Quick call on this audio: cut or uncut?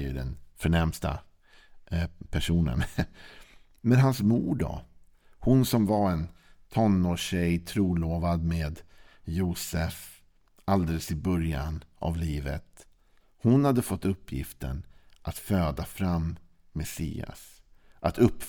uncut